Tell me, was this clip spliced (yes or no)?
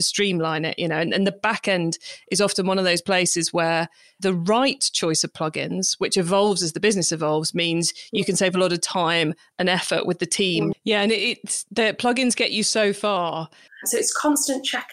yes